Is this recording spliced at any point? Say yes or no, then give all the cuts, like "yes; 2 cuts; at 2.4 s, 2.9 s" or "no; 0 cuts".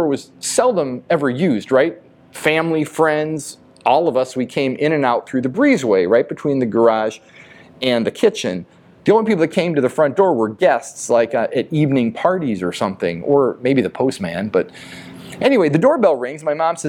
no; 0 cuts